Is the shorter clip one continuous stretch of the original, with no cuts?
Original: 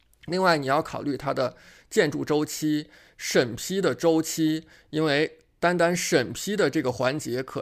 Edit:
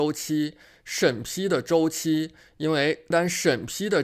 no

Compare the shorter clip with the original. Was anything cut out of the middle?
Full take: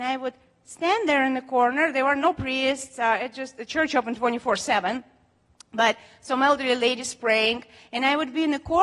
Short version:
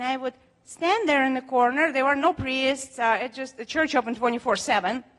no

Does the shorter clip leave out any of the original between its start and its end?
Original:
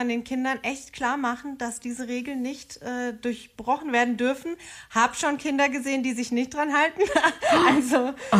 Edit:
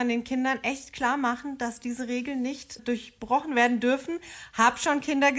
yes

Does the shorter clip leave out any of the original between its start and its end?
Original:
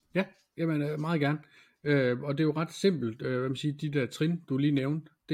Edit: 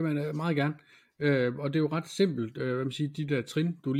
no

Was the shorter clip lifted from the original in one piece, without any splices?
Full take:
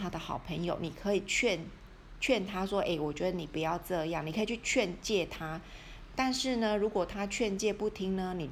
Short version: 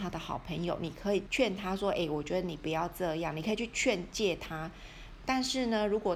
no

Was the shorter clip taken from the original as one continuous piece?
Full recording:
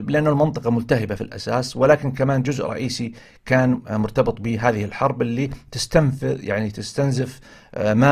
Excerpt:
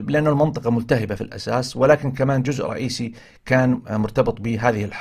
yes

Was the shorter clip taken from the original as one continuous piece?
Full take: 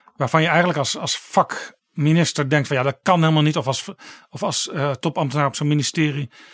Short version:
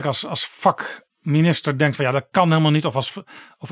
yes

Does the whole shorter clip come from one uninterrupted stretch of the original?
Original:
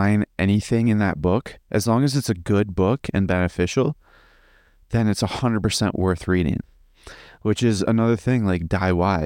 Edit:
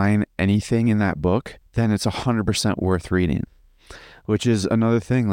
no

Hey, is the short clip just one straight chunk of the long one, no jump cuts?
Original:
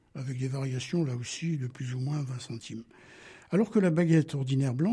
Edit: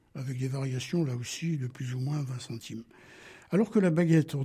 yes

